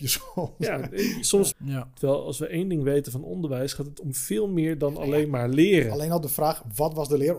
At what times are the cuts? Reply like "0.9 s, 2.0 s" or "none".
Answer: 1.5 s